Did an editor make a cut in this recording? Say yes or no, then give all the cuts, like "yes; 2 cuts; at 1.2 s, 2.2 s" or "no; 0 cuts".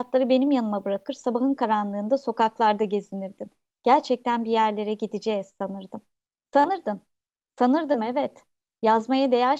no; 0 cuts